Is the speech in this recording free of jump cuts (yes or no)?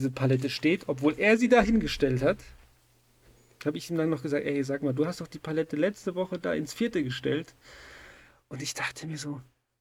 yes